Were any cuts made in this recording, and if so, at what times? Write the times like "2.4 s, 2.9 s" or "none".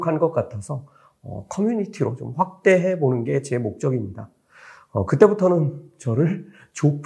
none